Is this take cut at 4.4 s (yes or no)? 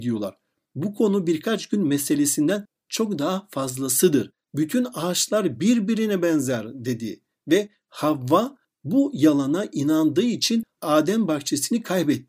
yes